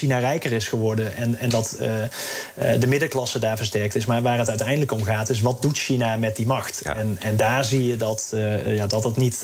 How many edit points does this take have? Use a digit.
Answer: 0